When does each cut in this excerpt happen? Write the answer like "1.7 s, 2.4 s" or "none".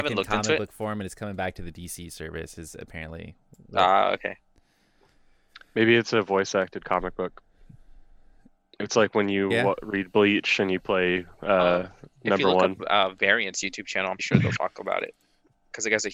14.2 s